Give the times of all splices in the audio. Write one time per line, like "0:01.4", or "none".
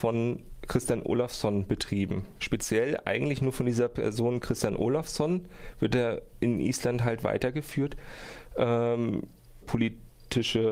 0:02.4
0:09.6